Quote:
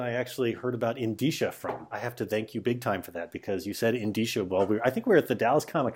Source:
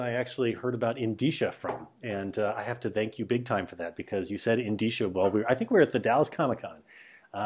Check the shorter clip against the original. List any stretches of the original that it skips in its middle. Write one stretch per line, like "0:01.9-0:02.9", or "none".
0:01.9-0:02.5

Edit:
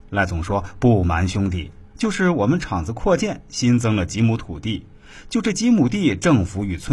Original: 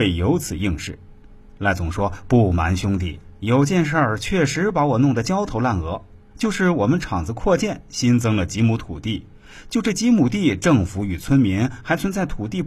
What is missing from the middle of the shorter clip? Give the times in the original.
0:03.3-0:06.3

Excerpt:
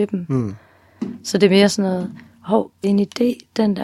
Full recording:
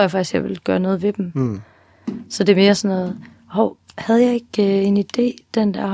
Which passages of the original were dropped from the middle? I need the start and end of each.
0:03.9-0:04.8

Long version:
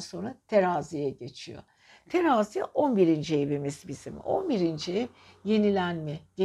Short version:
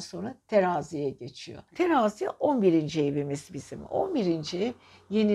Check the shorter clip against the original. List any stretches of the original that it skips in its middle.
0:01.7-0:02.0

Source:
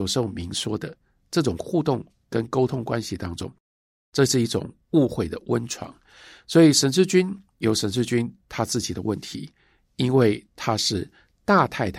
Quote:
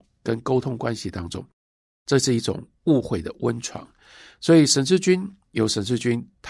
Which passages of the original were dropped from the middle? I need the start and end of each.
none

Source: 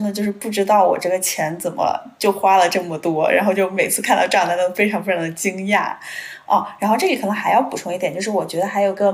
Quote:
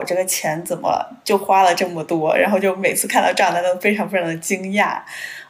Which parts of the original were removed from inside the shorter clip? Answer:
none

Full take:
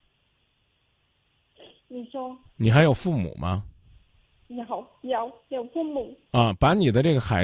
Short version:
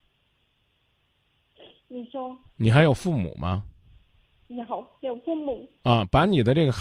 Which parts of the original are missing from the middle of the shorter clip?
0:05.0-0:05.4

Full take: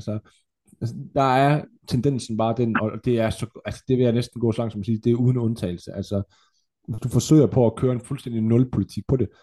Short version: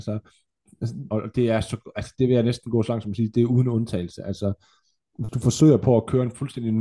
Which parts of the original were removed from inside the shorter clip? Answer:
0:01.1-0:02.8

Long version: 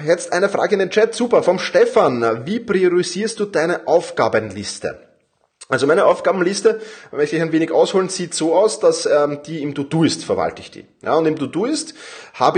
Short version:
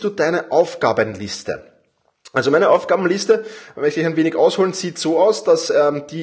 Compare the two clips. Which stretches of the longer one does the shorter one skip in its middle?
none

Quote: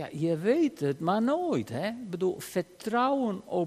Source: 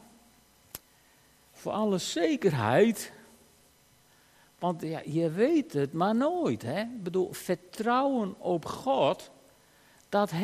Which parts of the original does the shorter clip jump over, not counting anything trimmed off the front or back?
none

